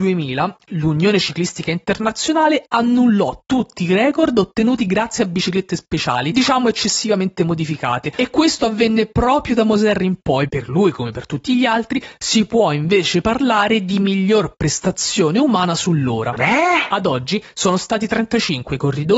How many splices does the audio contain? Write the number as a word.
two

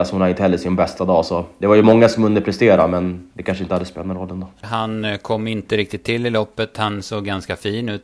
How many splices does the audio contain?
one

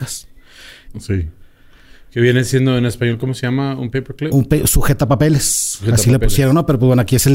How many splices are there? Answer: one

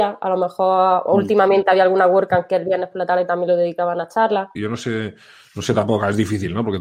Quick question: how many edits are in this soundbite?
one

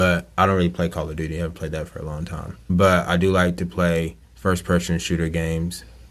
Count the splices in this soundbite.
two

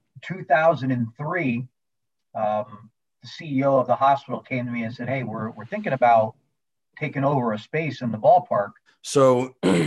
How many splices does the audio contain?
one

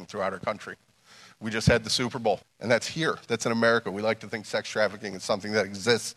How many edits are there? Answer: one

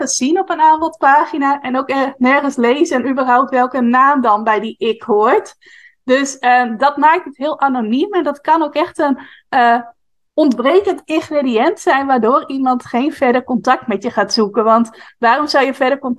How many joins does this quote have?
zero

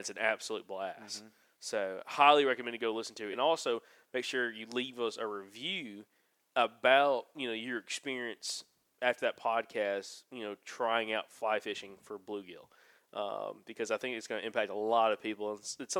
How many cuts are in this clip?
one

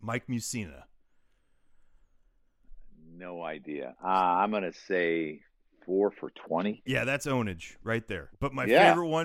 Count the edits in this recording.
two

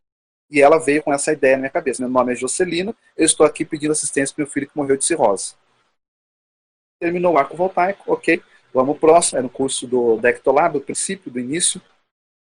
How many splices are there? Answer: one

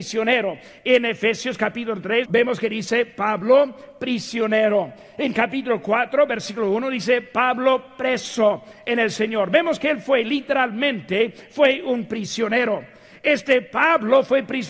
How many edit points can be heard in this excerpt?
one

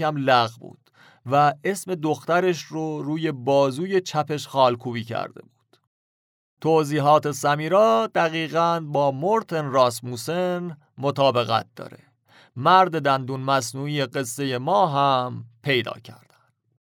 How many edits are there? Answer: zero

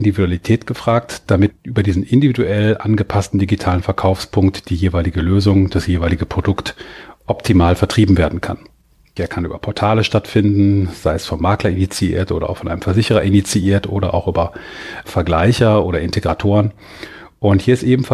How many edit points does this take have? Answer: three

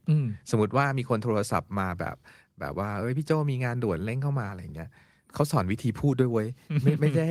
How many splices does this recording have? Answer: zero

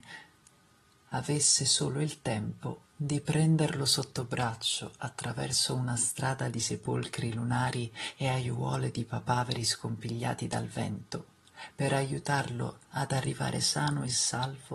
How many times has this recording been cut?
one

